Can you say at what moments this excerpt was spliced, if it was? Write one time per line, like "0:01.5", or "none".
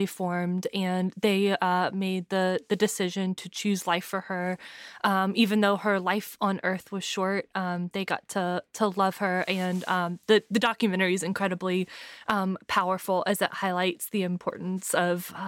none